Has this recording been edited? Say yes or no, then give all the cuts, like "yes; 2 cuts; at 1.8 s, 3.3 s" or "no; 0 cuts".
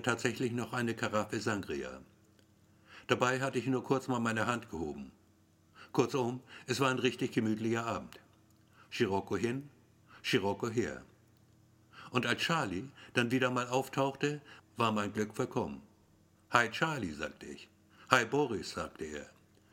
yes; 1 cut; at 14.6 s